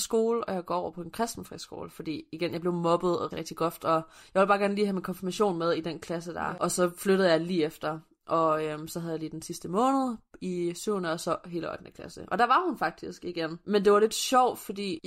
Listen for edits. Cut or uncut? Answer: cut